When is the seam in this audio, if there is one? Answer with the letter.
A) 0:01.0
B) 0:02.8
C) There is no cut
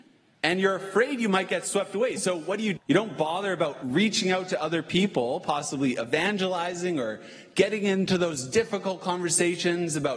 B